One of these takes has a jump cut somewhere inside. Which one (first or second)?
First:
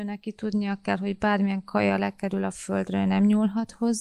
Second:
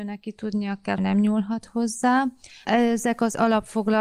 second